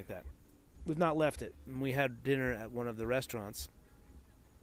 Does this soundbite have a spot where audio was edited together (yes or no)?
no